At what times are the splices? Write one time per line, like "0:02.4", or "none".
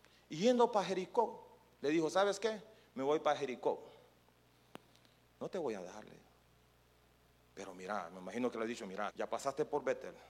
0:05.2
0:09.1